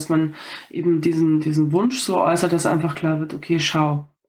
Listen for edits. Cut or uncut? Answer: uncut